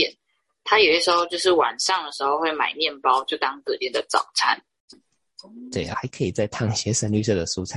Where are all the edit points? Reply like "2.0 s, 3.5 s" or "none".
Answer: 4.9 s, 5.9 s